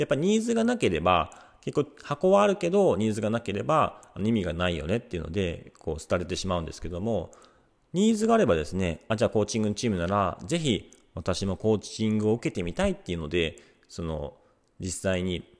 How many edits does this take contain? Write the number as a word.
zero